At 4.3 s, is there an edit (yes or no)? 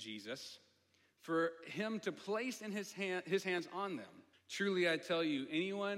yes